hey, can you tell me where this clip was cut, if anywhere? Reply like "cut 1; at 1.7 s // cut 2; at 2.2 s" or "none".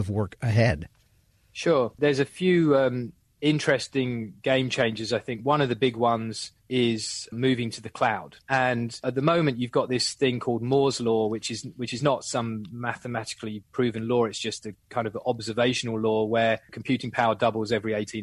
cut 1; at 8.4 s